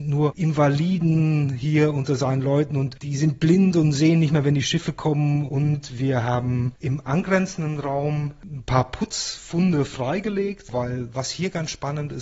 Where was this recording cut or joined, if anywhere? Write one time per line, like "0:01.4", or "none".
0:05.5